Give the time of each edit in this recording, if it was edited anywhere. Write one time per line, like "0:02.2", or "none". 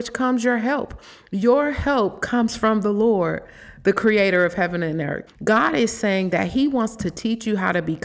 0:05.3